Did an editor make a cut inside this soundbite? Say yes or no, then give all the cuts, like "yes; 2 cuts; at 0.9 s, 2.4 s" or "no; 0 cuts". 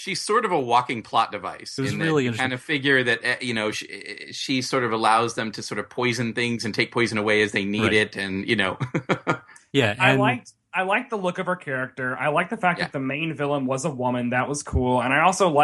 no; 0 cuts